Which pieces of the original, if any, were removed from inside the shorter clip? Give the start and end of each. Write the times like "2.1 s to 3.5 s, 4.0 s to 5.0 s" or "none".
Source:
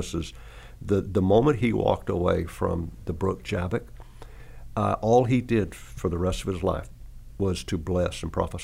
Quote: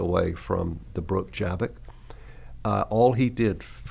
none